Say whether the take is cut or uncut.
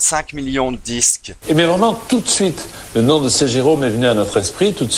cut